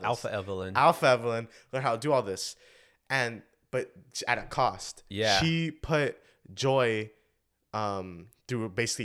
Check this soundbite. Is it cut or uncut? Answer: uncut